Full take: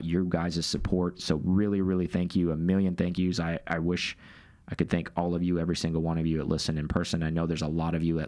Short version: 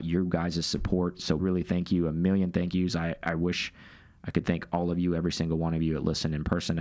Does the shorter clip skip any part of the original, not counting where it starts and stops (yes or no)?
yes